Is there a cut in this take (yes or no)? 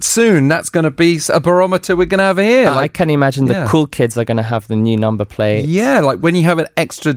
no